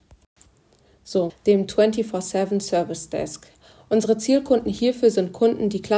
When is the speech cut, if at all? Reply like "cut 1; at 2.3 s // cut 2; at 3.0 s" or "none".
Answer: cut 1; at 1.3 s